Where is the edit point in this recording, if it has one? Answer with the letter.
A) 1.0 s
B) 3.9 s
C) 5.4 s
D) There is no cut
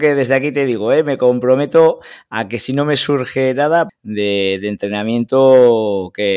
B